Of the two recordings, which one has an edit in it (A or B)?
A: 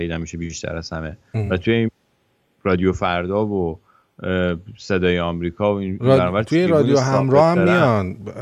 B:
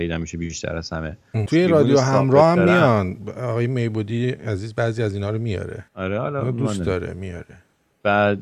B